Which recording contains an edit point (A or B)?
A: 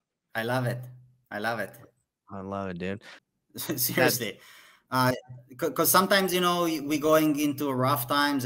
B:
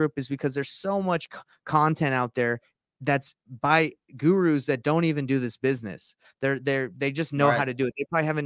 A